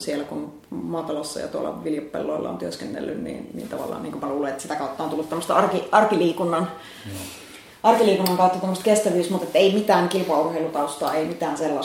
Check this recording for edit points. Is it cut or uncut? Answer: uncut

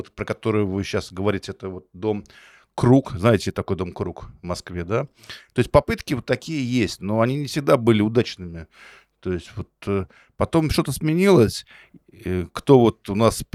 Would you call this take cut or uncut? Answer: uncut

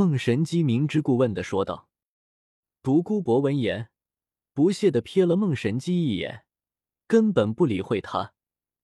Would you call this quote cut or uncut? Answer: uncut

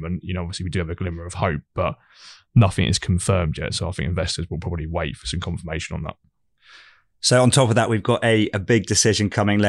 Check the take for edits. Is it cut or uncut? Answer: uncut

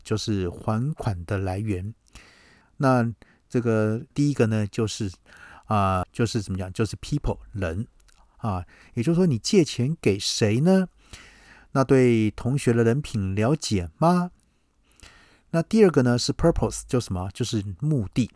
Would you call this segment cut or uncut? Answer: cut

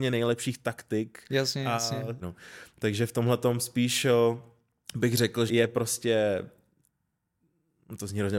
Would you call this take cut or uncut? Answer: cut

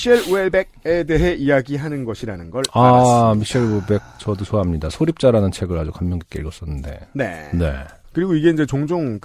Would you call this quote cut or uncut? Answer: uncut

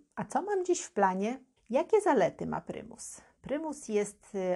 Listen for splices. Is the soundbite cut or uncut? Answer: cut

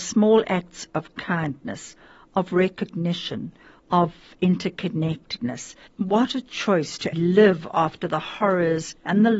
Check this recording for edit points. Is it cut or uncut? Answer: cut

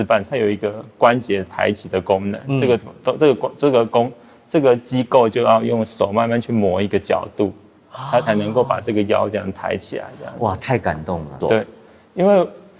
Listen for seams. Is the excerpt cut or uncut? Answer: cut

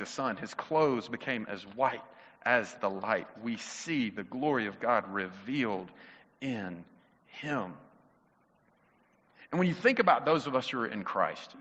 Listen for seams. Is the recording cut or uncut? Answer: uncut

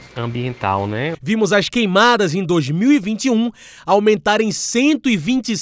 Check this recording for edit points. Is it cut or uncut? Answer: cut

